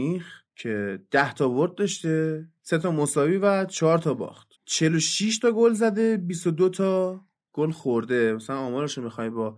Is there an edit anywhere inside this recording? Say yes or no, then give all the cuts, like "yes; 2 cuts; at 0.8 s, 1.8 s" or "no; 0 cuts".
yes; 1 cut; at 4.5 s